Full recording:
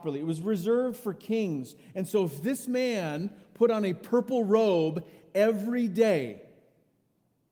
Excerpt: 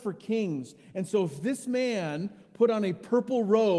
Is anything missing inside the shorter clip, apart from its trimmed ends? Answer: no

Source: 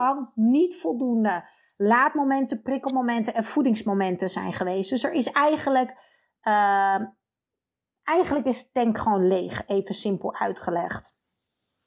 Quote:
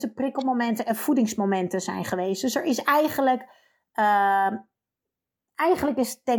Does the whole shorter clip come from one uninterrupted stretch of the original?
yes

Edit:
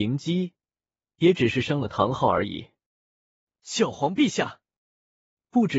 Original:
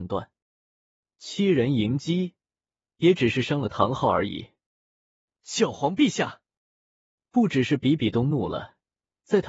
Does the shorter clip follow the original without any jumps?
yes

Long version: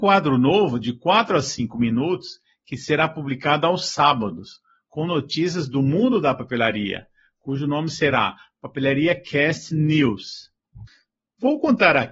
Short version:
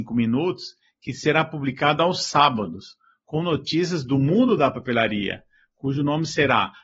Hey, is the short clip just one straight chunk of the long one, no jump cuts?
yes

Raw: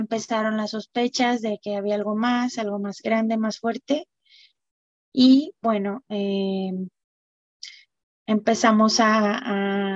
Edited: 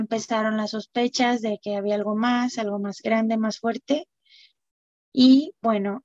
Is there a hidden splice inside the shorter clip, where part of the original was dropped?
no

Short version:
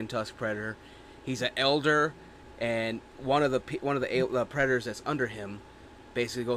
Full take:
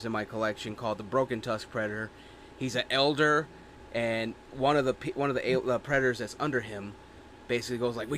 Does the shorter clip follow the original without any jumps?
yes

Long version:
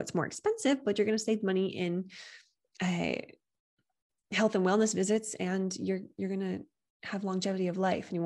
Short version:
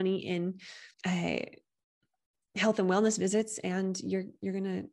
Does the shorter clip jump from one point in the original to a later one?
yes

